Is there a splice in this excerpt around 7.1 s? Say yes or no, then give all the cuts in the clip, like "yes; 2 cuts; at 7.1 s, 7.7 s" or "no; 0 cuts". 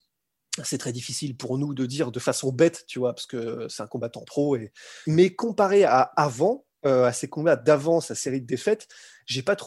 no; 1 cut; at 5.0 s